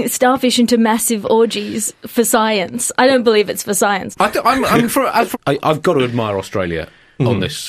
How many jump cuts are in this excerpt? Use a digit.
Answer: 2